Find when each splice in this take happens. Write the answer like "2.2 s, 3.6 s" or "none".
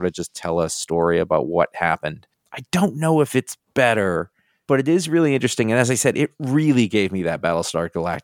3.6 s